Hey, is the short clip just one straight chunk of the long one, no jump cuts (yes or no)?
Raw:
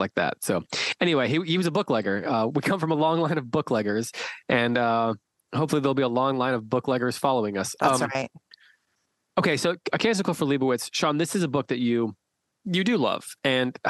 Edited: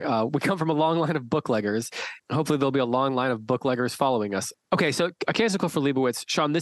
no